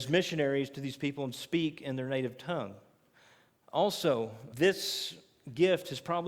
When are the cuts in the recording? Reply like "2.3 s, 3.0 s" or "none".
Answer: 4.5 s